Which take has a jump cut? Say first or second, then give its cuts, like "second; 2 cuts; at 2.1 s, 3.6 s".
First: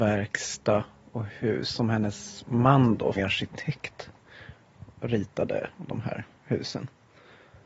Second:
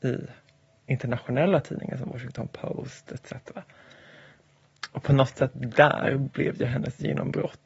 first; 2 cuts; at 3.1 s, 5.0 s